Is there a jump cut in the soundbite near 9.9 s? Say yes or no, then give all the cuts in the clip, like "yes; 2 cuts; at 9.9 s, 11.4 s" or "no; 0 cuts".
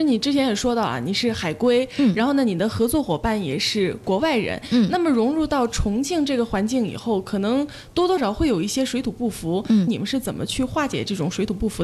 yes; 2 cuts; at 8.2 s, 9.9 s